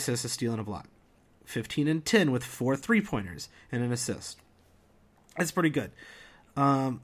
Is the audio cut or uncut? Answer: uncut